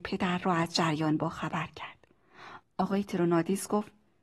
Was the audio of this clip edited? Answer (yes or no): yes